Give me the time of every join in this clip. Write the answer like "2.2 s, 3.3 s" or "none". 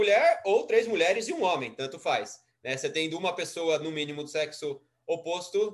none